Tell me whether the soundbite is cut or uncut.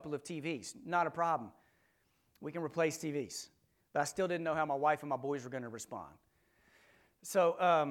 uncut